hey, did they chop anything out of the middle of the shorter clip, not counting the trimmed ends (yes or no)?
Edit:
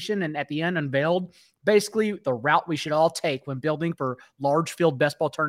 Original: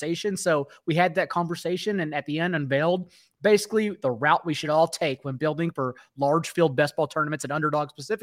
no